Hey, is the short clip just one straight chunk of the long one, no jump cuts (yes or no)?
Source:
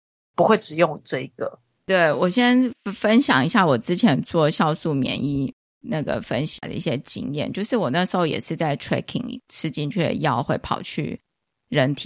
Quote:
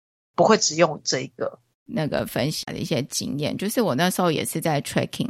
no